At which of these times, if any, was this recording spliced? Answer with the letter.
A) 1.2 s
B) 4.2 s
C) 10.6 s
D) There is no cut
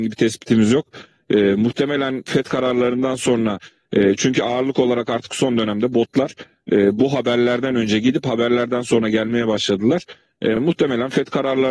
D